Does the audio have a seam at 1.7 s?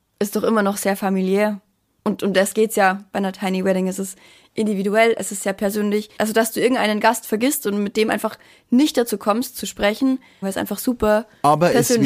no; 2 cuts; at 6.2 s, 10.4 s

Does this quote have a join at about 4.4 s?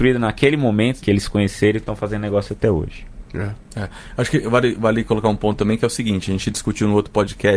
no; 1 cut; at 1.0 s

